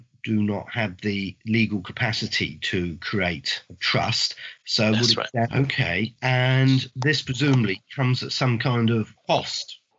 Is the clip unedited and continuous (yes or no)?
no